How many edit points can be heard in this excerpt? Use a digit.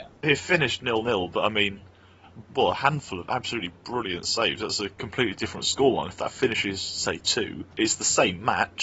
2